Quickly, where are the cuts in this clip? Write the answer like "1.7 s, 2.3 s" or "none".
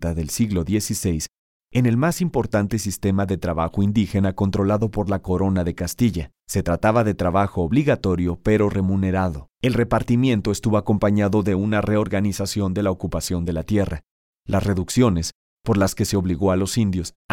6.4 s, 9.5 s